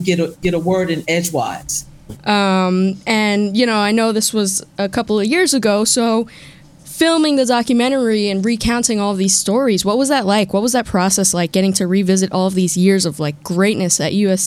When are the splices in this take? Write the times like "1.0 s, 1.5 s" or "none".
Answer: 2.2 s